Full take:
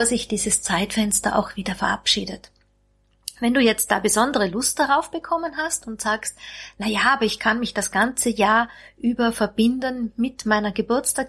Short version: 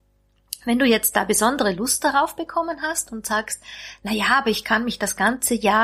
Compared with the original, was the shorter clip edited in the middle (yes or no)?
no